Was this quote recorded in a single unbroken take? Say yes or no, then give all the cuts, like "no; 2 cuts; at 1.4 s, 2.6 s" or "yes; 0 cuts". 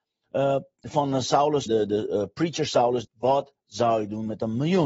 no; 2 cuts; at 1.7 s, 3.0 s